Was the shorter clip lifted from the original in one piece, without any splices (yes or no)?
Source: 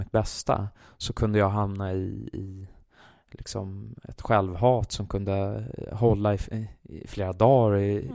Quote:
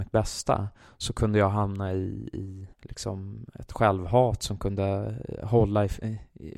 no